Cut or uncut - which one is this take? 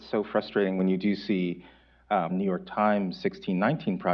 cut